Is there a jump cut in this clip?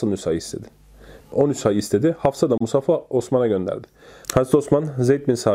yes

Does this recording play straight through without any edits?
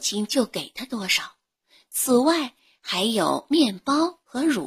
yes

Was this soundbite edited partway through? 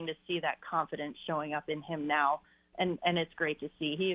yes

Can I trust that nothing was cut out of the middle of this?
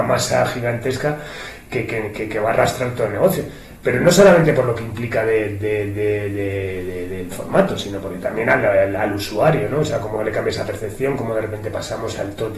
yes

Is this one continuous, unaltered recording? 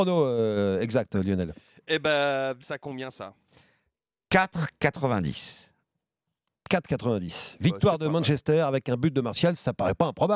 no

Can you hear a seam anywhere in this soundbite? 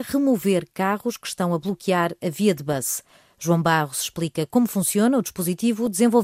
no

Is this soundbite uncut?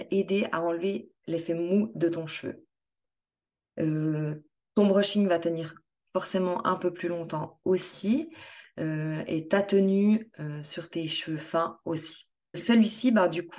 yes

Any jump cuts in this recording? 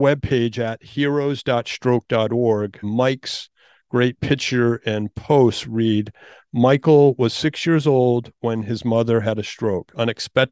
yes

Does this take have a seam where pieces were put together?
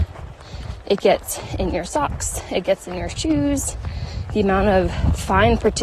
yes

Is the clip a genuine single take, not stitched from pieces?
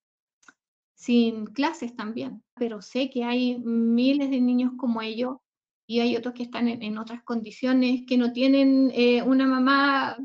no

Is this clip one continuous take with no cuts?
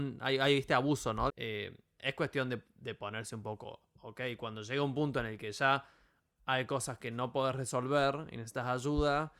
no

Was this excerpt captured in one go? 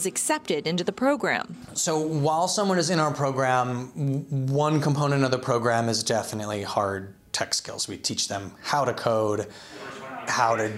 yes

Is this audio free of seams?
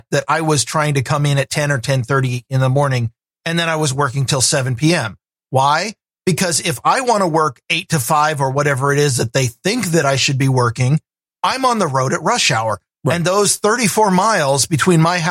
yes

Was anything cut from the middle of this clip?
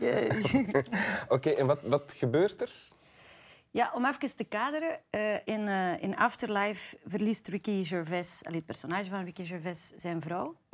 yes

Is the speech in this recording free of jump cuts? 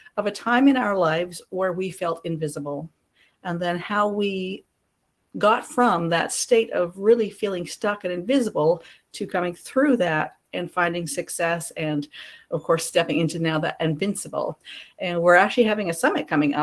yes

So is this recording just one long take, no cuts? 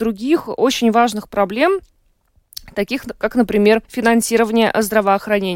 no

